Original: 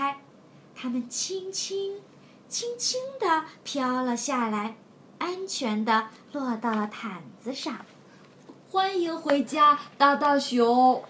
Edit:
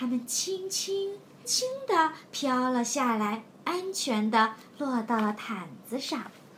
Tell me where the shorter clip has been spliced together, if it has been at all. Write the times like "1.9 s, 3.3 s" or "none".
1.4 s, 3.5 s